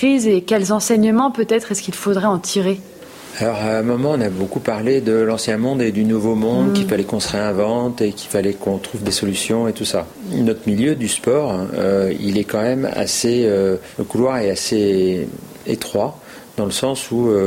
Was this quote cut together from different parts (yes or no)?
no